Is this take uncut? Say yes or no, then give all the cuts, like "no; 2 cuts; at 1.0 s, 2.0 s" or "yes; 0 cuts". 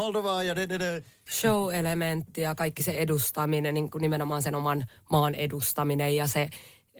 no; 1 cut; at 1.3 s